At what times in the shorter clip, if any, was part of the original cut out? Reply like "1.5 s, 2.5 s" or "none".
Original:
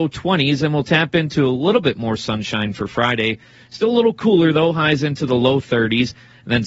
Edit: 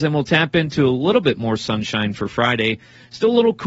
none